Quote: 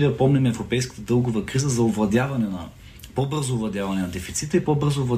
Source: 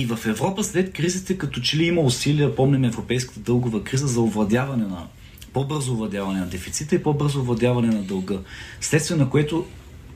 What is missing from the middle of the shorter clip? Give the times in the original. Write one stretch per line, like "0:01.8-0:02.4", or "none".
none